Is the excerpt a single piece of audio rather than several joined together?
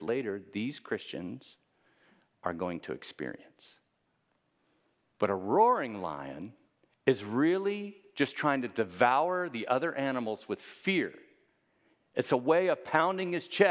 no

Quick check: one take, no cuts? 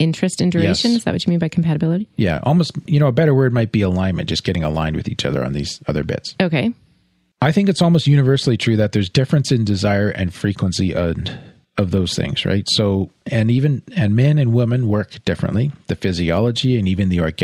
yes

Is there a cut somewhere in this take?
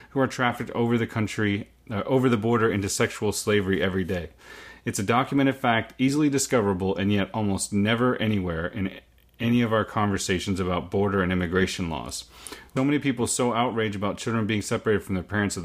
yes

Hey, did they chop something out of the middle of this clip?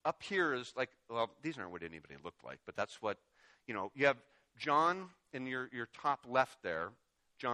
no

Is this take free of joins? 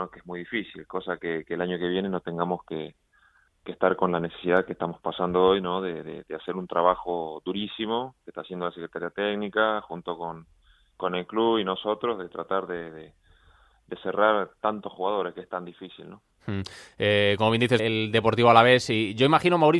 no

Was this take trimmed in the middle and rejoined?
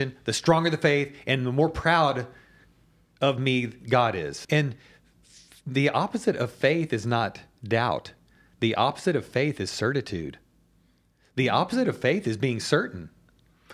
yes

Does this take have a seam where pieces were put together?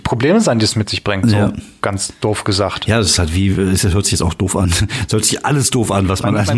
no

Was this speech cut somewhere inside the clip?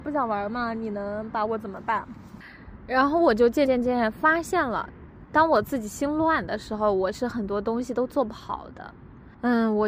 yes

